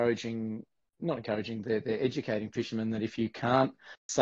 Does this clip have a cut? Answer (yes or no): no